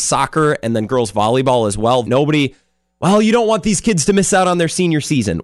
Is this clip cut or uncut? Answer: cut